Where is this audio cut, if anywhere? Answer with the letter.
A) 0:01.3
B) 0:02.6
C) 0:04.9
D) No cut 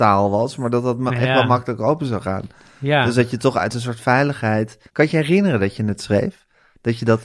C